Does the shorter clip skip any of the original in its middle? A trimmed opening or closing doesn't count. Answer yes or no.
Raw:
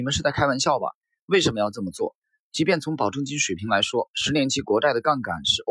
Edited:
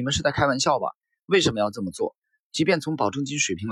no